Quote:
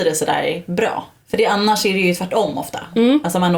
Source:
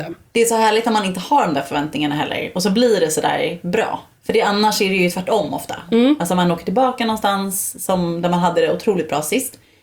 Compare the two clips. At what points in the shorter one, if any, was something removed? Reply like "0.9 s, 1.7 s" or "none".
none